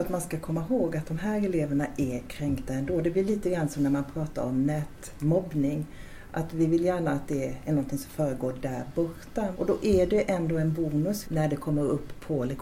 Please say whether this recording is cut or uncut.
cut